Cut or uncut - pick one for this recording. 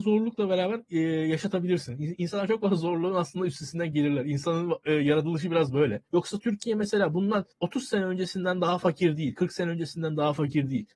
cut